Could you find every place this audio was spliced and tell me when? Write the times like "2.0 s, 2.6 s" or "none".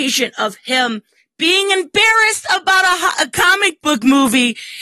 none